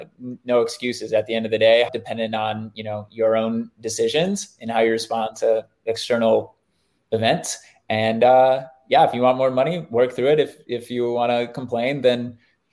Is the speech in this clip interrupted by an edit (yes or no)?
yes